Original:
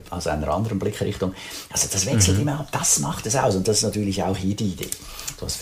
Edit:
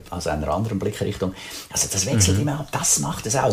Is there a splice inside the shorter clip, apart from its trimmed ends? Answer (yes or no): no